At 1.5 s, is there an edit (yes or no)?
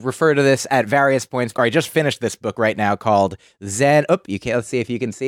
yes